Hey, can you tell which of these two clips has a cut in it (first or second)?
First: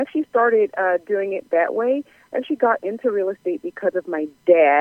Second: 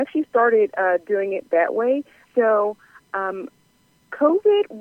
second